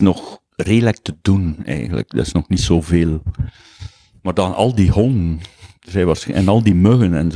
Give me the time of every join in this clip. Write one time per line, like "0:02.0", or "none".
none